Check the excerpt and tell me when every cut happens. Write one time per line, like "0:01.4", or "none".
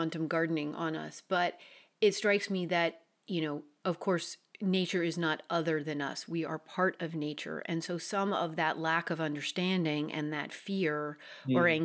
none